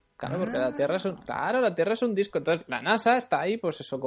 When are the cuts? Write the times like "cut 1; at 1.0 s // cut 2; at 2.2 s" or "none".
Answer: none